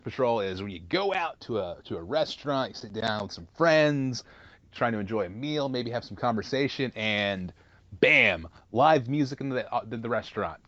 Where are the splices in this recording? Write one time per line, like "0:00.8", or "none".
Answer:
none